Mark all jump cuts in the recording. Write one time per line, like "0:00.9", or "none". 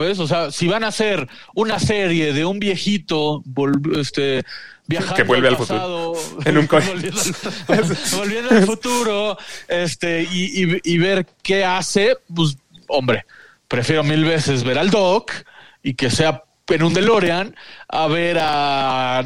none